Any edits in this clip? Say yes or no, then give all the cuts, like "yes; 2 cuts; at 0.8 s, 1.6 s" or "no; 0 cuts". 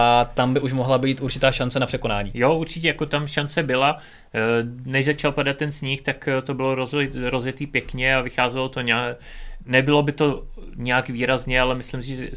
no; 0 cuts